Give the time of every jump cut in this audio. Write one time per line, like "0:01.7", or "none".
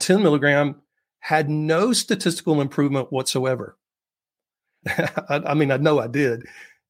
0:04.8